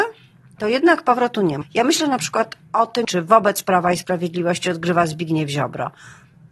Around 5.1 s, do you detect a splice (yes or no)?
no